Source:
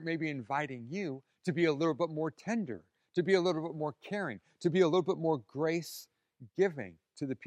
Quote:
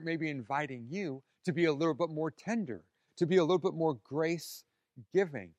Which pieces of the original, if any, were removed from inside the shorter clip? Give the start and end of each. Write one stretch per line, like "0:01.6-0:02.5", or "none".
0:03.1-0:04.5